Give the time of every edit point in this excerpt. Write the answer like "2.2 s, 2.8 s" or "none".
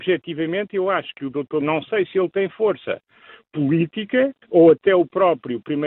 1.6 s, 4.4 s